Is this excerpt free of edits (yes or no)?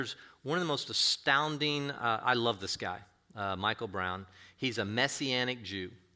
yes